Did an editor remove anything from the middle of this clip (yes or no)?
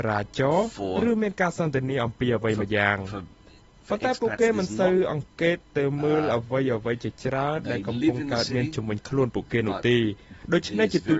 no